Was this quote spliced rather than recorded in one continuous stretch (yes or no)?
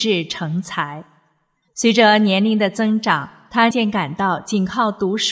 yes